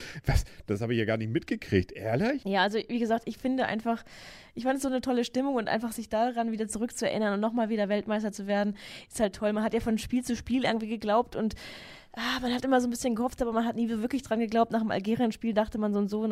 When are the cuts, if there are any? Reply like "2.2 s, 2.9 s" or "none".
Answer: 2.4 s

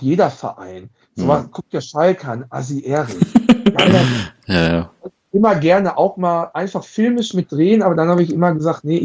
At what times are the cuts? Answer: none

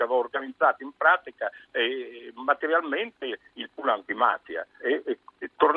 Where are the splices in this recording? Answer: 4.8 s

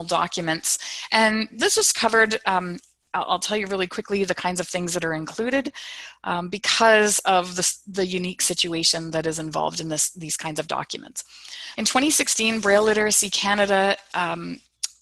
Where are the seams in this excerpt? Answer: 11.8 s

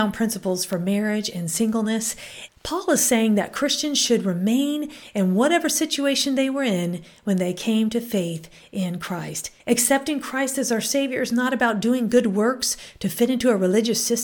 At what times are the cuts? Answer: 2.5 s, 9.6 s

